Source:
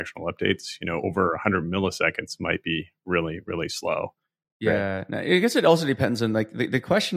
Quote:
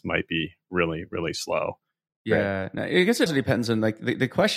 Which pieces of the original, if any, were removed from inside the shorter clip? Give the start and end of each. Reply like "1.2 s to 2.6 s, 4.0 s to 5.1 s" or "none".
5.6 s to 5.8 s

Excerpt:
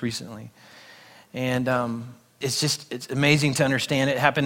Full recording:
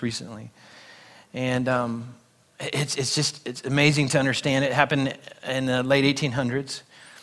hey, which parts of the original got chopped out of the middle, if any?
2.4 s to 3.0 s

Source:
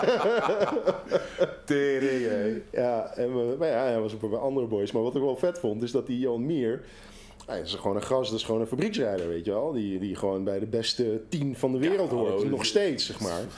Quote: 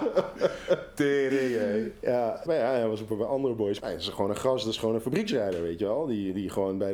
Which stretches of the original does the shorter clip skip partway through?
3.2 s to 3.6 s, 4.9 s to 7.4 s

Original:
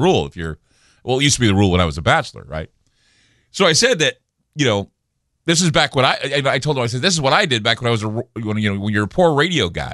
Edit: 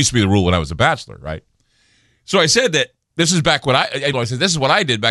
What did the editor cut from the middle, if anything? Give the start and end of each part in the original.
4.4 s to 5.4 s, 6.4 s to 6.8 s

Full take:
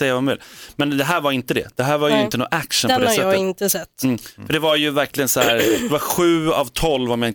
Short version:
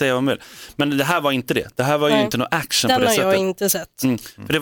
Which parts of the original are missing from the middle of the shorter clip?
none

